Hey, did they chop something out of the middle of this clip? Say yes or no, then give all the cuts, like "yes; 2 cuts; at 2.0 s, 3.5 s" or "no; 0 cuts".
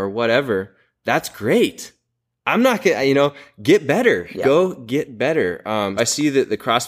yes; 1 cut; at 6.0 s